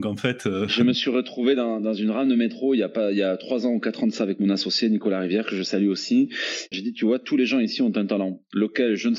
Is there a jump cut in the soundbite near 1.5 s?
no; 1 cut; at 6.7 s

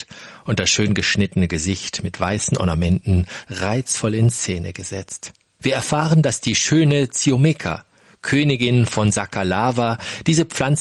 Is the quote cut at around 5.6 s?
yes; 1 cut; at 5.6 s

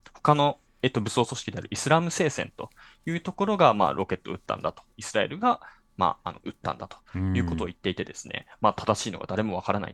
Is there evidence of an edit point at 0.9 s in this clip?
no; 1 cut; at 4.9 s

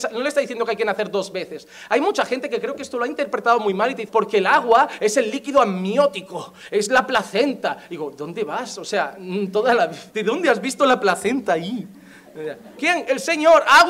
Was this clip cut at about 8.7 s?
no; 3 cuts; at 4.1 s, 10.1 s, 12.8 s

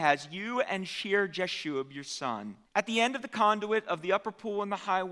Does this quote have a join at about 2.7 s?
yes; 1 cut; at 2.7 s

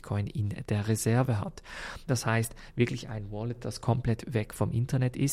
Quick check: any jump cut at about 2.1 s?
yes; 1 cut; at 2.1 s

